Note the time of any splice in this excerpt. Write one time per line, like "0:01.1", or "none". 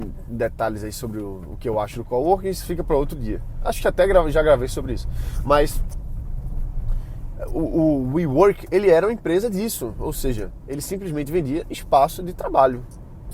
none